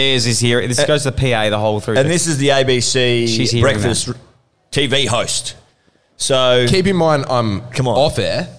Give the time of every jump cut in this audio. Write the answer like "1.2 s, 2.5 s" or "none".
none